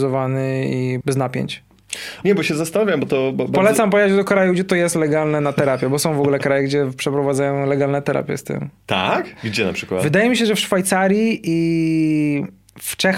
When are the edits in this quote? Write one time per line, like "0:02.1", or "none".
0:01.0
0:02.2